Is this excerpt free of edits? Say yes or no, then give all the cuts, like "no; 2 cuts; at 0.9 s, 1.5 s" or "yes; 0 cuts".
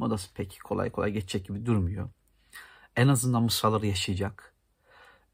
yes; 0 cuts